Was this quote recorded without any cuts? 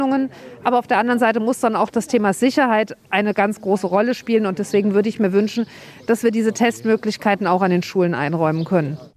no; 1 cut; at 3.0 s

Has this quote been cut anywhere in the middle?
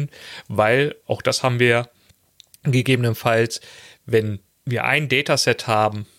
no; 0 cuts

